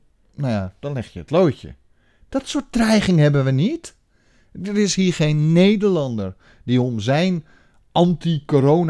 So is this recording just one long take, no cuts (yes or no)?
yes